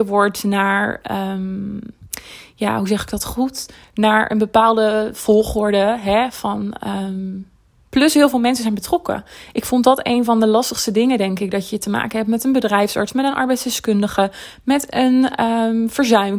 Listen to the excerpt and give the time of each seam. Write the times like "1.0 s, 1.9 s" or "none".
none